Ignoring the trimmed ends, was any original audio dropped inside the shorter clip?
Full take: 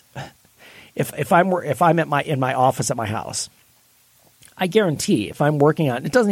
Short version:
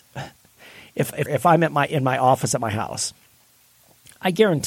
yes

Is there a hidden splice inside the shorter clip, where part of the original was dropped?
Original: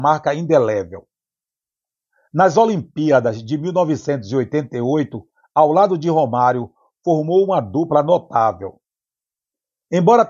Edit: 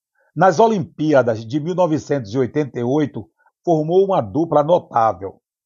yes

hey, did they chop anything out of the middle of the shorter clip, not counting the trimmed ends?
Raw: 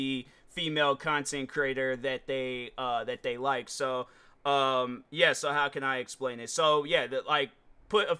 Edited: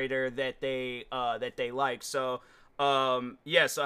no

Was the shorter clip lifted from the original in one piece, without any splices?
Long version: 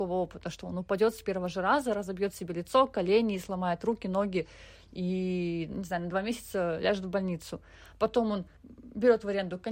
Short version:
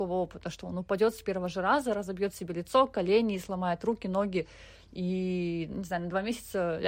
yes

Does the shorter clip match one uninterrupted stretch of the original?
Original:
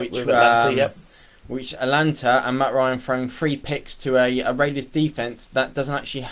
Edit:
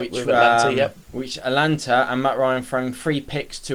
no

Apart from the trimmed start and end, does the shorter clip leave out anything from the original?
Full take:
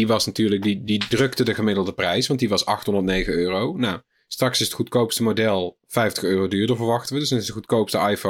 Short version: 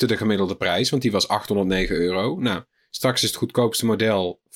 no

